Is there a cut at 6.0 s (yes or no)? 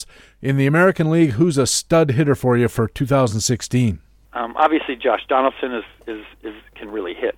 no